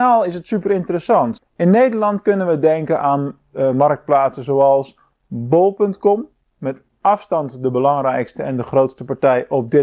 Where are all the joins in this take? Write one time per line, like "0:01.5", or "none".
0:01.4